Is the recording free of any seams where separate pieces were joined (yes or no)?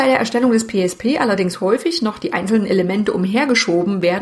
yes